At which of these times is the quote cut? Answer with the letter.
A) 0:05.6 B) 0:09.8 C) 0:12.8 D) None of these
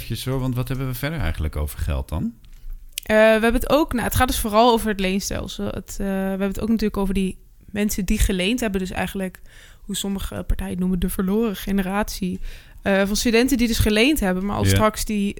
D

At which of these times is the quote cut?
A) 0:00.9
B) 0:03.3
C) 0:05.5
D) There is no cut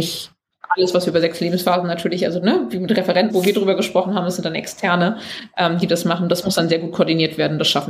B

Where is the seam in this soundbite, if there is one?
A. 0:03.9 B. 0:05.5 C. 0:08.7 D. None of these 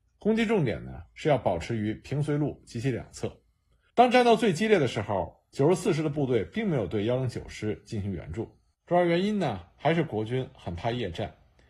A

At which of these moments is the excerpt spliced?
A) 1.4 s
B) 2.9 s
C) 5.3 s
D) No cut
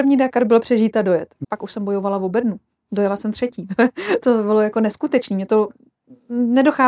A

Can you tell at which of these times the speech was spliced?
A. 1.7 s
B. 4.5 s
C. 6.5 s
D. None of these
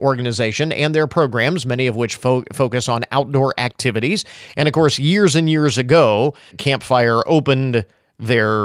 C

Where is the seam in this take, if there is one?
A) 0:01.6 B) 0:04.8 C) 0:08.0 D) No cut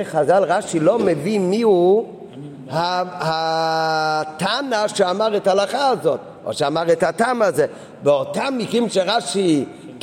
D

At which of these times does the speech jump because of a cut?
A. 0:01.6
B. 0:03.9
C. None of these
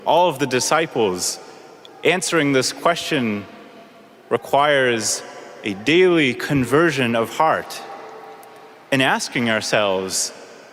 C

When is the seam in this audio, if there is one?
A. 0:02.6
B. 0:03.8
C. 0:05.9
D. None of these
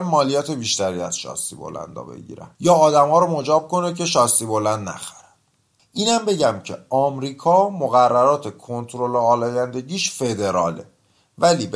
A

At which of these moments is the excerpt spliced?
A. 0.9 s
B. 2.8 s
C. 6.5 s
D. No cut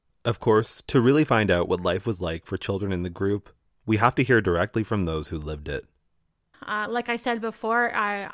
C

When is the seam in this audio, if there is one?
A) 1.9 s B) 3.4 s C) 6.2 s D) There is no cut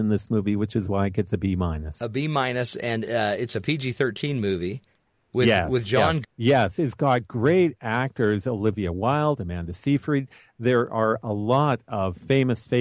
C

